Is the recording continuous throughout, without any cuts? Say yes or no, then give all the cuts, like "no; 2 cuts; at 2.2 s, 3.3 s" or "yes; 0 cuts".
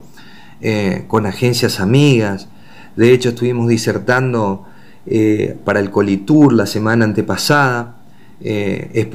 yes; 0 cuts